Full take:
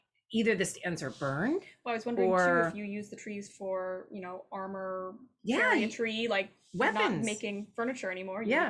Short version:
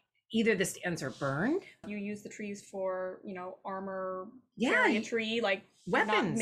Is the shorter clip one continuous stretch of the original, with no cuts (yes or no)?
no